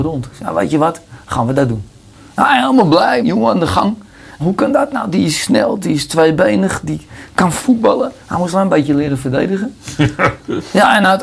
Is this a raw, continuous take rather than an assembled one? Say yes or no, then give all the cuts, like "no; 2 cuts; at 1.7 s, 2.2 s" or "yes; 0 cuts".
no; 3 cuts; at 3.2 s, 4.4 s, 5.8 s